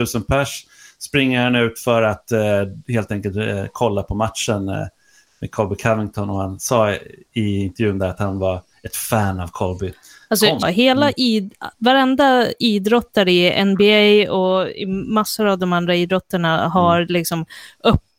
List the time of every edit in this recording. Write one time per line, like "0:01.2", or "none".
0:10.6